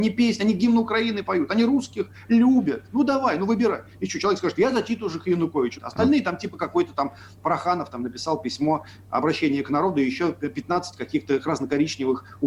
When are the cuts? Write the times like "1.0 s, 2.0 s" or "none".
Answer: 5.7 s